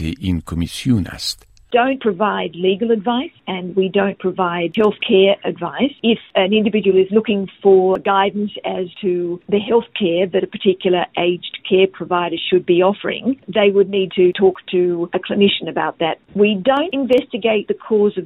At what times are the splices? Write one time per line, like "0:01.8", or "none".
none